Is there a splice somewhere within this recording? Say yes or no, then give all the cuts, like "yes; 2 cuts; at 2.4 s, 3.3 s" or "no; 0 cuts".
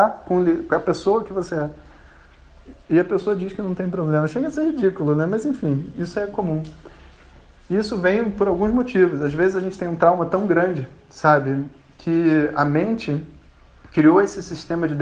no; 0 cuts